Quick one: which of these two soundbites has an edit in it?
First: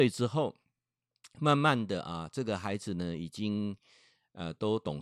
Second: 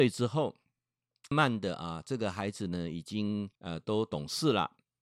second; 2 cuts; at 1.3 s, 3.6 s

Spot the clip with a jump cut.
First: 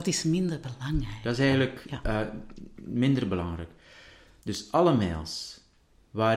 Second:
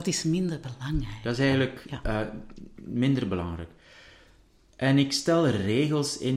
first; 1 cut; at 4.4 s

